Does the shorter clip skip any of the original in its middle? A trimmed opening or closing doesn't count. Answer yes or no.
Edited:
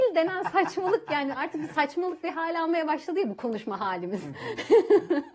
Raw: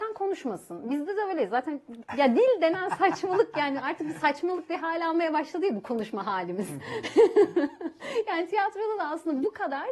no